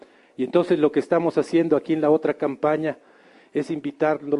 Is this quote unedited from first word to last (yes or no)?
yes